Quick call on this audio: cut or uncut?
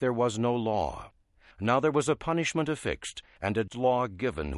cut